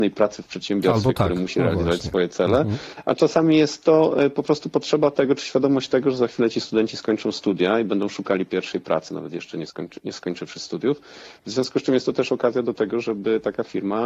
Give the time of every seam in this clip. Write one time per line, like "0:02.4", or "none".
0:09.1